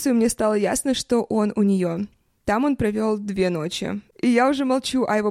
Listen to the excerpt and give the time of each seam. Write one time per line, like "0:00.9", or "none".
none

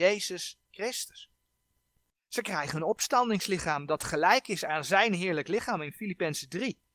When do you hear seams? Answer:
none

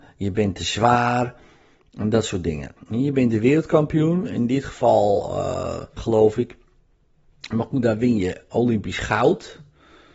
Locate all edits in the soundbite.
0:02.8
0:06.0

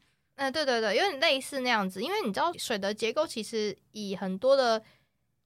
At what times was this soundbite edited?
0:02.5

